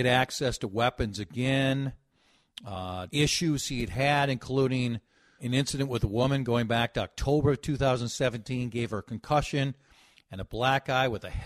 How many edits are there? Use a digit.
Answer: 2